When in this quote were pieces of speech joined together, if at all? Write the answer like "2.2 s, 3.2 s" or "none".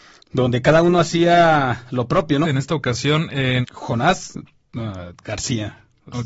2.4 s, 3.6 s